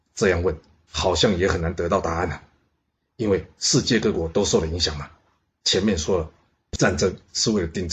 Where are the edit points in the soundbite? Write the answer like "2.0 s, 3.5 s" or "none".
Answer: 5.5 s